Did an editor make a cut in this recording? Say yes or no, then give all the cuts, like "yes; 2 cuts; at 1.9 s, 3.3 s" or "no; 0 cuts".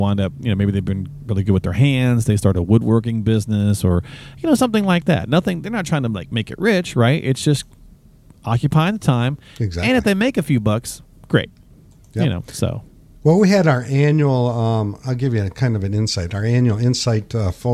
no; 0 cuts